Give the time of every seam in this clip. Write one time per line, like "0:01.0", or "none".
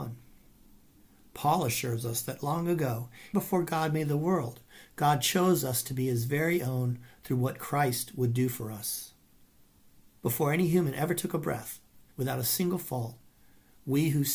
0:03.3
0:12.1